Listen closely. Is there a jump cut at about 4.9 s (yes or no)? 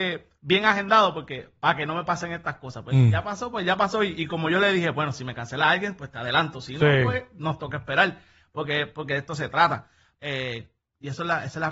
no